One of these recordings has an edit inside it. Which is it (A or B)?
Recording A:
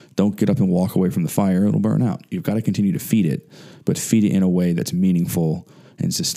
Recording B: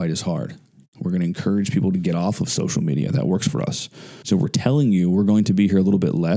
B